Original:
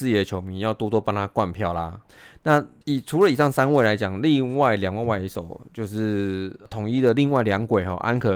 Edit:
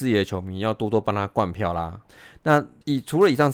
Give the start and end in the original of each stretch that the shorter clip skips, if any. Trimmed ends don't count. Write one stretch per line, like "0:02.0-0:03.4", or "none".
none